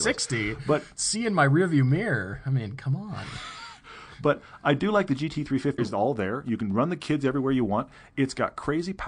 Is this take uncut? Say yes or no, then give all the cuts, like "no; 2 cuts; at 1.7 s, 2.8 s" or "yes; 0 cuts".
no; 1 cut; at 5.8 s